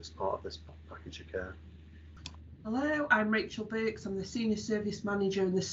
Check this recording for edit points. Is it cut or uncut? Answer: uncut